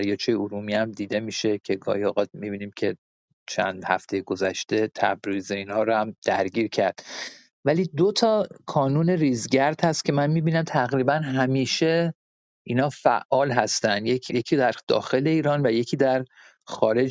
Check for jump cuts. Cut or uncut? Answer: cut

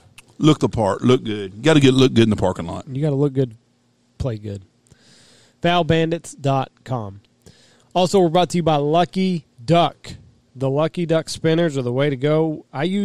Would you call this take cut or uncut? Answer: uncut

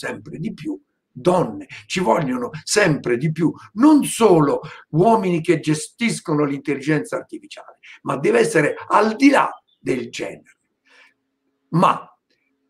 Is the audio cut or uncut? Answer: uncut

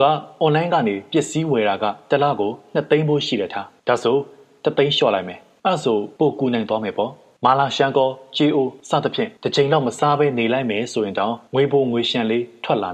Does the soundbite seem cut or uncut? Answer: uncut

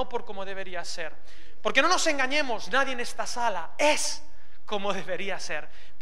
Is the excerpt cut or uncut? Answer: uncut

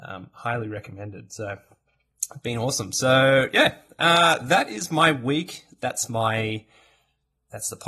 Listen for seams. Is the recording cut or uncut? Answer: uncut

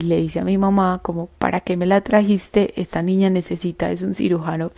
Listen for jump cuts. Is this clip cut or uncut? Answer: uncut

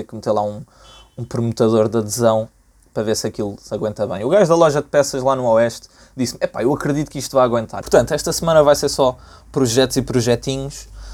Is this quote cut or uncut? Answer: cut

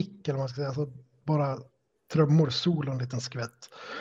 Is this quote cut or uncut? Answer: uncut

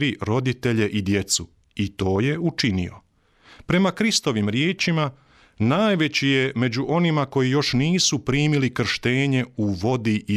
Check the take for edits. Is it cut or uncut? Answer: uncut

